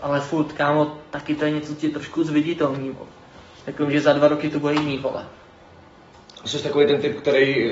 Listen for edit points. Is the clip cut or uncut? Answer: uncut